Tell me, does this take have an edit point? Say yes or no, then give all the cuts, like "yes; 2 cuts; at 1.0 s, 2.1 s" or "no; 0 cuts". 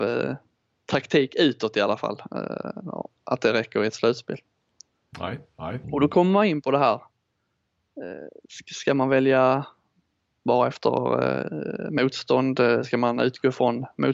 yes; 1 cut; at 5.8 s